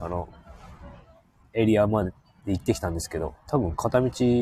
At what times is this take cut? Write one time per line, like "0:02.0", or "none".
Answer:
none